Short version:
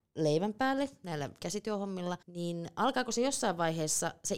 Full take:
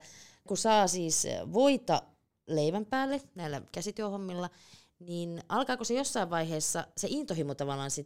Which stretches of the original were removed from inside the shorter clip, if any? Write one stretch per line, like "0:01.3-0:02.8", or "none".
0:04.5-0:04.9